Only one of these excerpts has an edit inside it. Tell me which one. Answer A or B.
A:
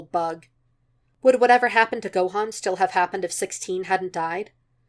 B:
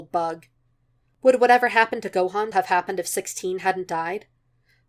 B